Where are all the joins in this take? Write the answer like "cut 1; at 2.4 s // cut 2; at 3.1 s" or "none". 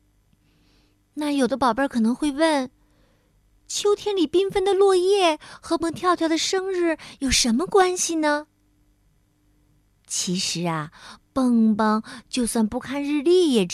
cut 1; at 5.8 s